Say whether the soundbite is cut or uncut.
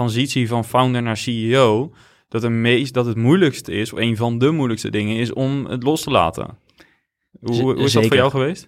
uncut